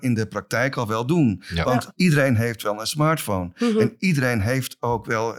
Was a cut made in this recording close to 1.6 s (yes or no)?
no